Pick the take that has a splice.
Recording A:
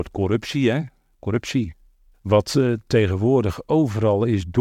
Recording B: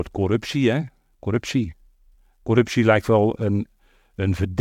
A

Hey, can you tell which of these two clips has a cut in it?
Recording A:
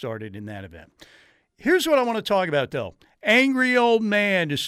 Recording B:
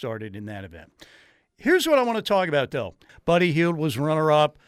B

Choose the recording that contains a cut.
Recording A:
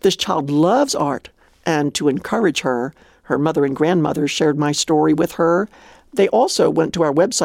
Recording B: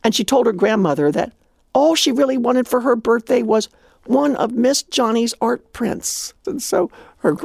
B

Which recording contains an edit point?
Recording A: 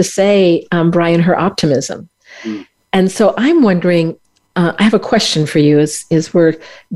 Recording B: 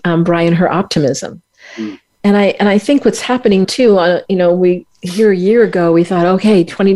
B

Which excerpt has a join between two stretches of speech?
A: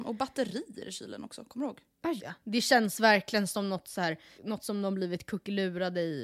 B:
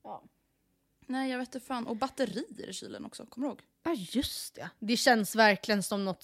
A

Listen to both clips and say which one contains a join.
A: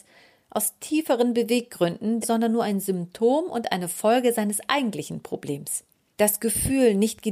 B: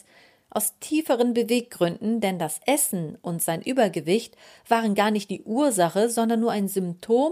A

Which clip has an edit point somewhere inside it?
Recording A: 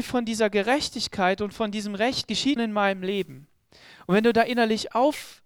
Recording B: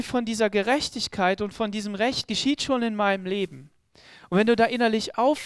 A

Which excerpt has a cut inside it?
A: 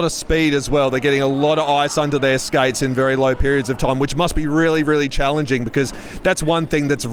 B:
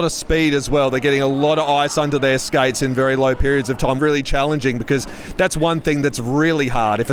B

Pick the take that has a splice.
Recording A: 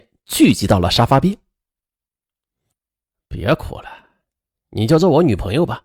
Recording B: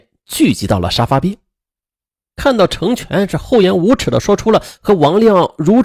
B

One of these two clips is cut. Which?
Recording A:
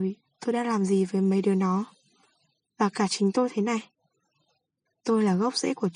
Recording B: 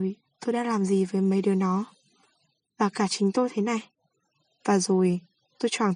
B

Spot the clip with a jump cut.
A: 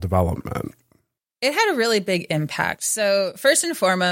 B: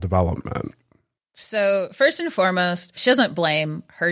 B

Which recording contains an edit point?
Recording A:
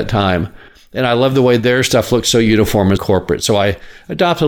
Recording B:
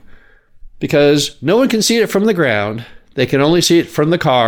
A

